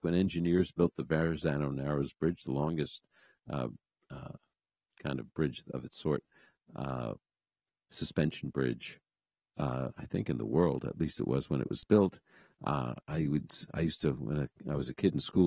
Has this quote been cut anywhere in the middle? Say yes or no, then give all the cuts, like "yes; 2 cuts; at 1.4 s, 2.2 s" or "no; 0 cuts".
no; 0 cuts